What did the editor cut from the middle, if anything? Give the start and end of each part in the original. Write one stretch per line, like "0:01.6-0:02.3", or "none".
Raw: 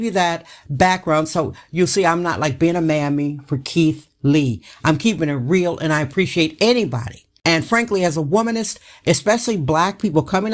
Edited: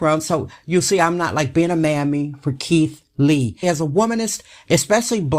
0:04.7-0:08.0